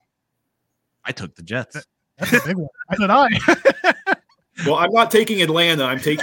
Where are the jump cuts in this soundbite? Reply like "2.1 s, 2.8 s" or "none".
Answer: 3.0 s

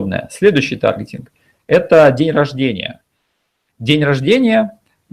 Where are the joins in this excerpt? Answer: none

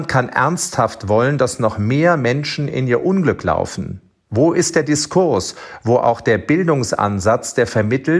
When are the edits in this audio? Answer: 4.2 s

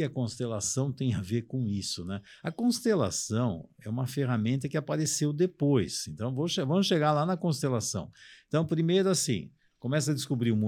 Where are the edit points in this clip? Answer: none

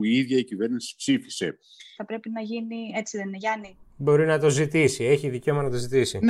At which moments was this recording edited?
2.0 s

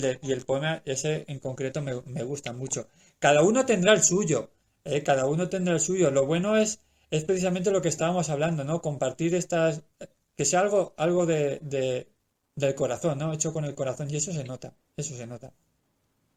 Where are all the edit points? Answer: none

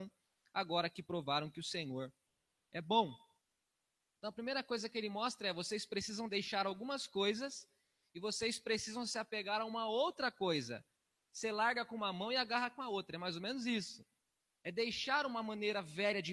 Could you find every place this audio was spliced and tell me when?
14.6 s

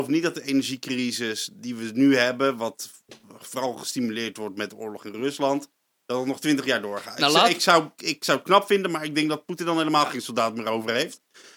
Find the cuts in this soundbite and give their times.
8.0 s

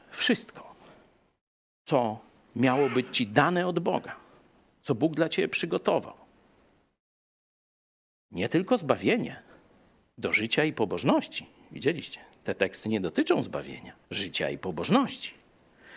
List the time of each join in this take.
14.0 s

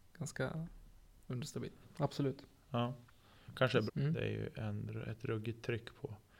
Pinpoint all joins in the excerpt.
1.8 s, 3.9 s

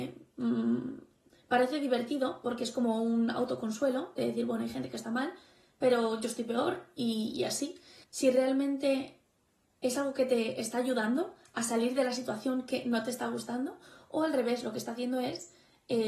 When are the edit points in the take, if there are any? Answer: 8.0 s

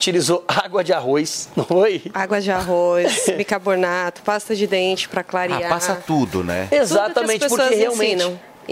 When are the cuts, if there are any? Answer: none

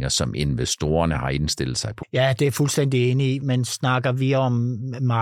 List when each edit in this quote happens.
2.0 s

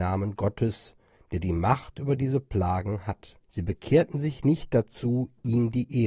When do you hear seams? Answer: 3.4 s

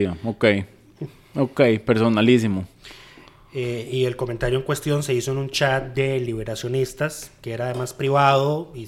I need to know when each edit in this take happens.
none

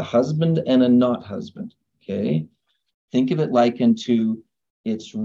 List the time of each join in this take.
2.9 s

